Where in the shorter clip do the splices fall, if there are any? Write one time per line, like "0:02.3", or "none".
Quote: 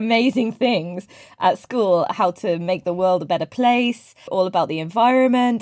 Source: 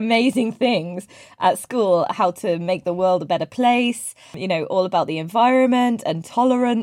0:04.3